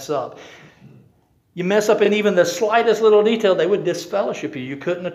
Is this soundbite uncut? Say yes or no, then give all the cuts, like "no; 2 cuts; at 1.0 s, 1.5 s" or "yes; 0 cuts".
yes; 0 cuts